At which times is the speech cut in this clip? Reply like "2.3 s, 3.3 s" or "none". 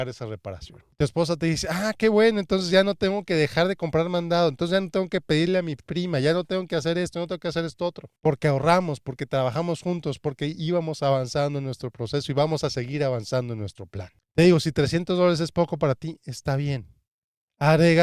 none

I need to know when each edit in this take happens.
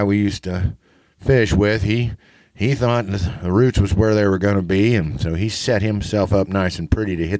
none

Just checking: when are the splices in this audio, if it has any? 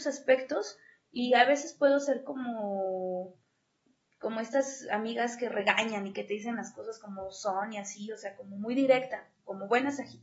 none

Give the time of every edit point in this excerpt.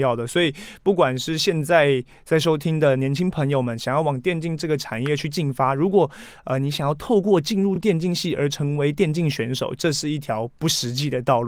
none

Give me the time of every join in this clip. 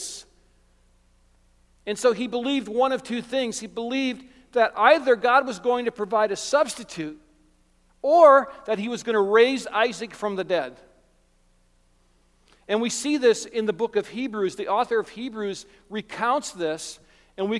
none

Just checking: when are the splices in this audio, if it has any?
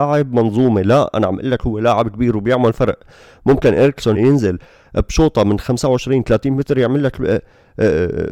4.1 s

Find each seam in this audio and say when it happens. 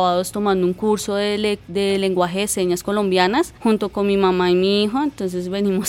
none

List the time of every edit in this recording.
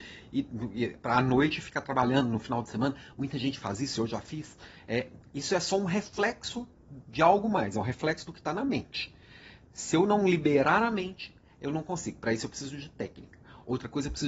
none

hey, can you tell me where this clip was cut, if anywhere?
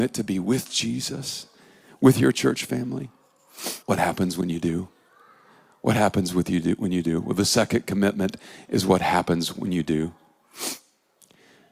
3.8 s

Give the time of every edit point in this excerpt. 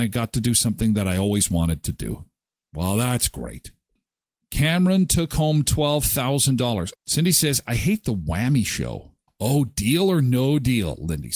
6.9 s, 9.3 s

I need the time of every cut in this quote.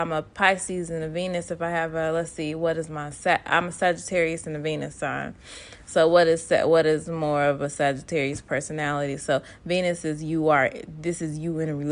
none

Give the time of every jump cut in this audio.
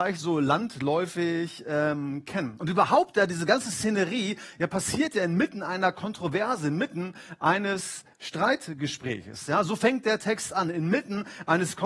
none

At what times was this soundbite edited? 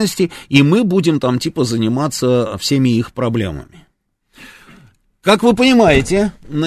none

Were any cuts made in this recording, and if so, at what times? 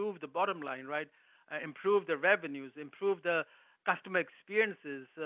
none

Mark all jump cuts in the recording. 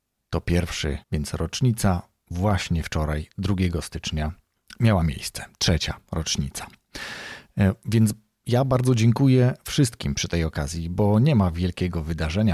1.0 s

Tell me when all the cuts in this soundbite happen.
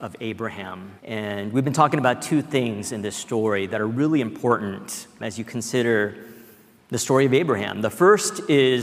1.0 s, 5.2 s

